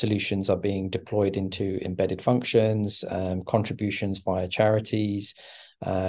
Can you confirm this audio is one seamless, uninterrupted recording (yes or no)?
yes